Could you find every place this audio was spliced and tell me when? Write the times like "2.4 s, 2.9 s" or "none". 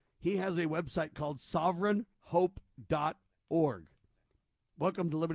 none